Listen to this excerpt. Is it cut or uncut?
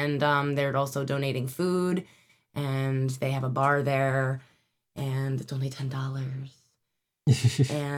uncut